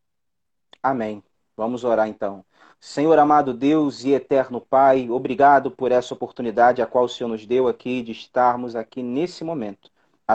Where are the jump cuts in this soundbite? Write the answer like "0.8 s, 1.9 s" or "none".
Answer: none